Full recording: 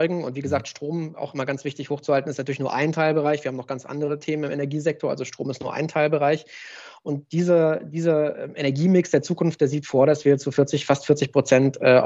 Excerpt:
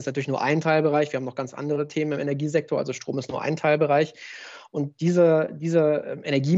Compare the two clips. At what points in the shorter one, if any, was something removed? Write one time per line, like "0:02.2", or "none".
none

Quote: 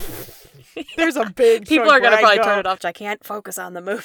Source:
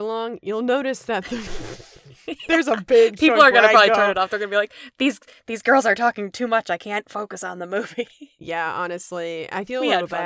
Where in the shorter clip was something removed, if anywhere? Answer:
0:02.8

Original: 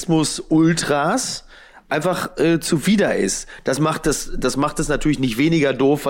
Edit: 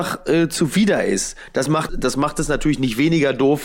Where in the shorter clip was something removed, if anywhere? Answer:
0:01.9

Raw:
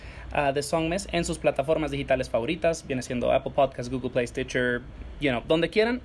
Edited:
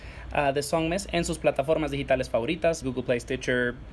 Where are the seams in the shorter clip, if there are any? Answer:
0:02.8

